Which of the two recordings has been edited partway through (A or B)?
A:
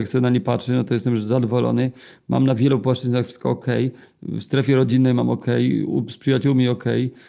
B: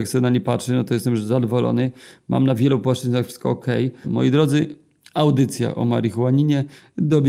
B